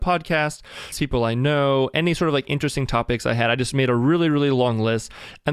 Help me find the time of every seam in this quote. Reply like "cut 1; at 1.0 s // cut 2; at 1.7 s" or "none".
cut 1; at 0.9 s